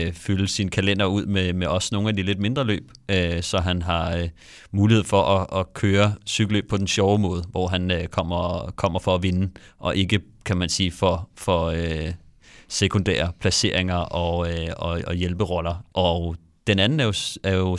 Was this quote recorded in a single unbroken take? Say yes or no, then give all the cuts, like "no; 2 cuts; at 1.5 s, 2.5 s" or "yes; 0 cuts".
no; 1 cut; at 15.9 s